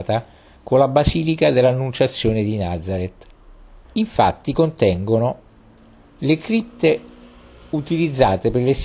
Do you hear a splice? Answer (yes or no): yes